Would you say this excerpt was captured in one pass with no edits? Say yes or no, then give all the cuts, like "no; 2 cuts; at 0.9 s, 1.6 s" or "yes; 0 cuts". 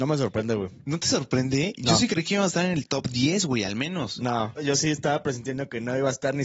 no; 1 cut; at 4.6 s